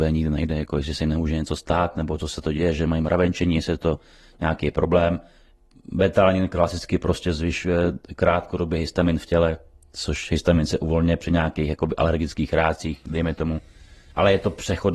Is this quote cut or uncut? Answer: uncut